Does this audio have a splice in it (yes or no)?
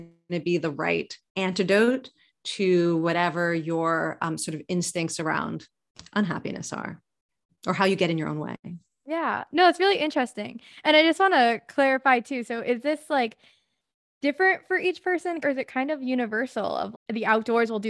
yes